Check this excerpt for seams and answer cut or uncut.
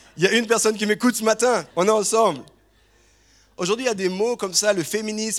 cut